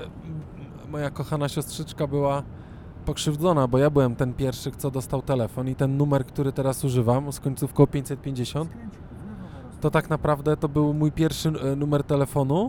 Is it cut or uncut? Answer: uncut